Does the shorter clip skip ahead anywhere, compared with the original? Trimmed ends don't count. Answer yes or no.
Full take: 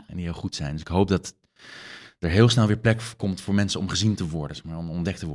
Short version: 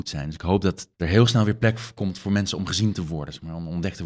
yes